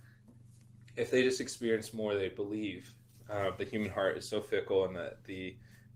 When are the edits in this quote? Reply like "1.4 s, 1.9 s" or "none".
3.6 s